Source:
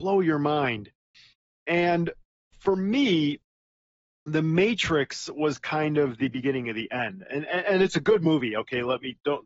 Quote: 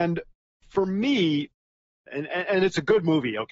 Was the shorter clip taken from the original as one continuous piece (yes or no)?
no